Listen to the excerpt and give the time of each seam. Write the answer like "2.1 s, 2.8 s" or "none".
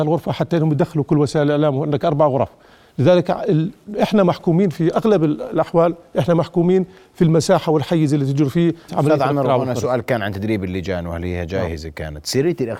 8.9 s